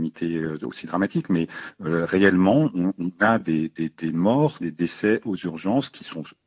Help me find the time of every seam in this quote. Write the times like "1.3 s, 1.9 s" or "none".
none